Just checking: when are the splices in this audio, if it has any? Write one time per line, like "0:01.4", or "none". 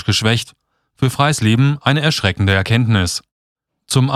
none